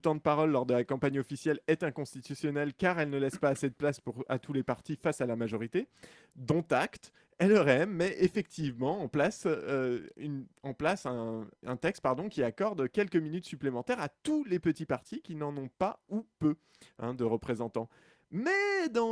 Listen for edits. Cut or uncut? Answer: uncut